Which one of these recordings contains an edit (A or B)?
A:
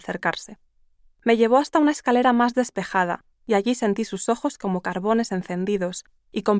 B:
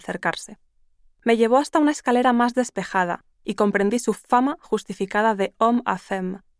B